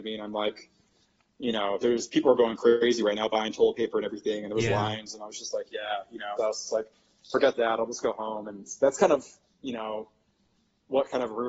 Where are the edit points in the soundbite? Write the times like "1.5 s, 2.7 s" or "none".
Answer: 6.4 s